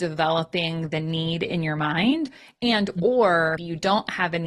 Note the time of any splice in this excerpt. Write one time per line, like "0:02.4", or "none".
0:03.6